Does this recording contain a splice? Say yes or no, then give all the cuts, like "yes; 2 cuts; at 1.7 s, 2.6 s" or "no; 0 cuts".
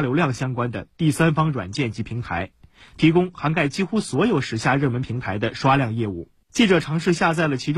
yes; 1 cut; at 6.4 s